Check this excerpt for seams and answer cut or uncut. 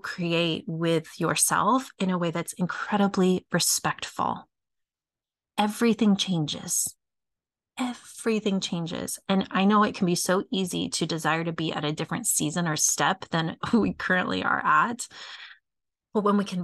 uncut